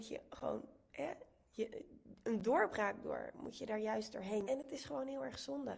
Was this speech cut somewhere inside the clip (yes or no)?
yes